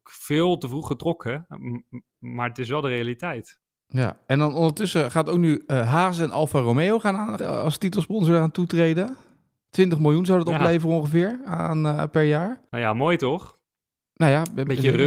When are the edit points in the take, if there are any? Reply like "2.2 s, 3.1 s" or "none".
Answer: 7.4 s